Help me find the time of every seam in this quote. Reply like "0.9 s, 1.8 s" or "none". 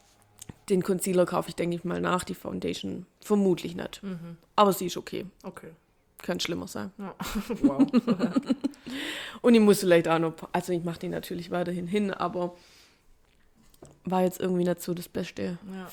none